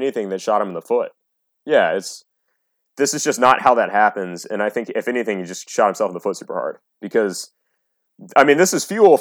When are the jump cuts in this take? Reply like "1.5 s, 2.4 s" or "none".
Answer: none